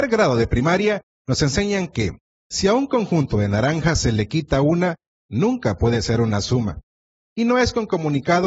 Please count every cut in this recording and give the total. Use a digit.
1